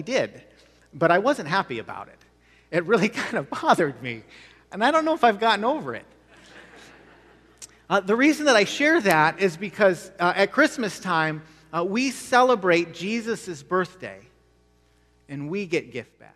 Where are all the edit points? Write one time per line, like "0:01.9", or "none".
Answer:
none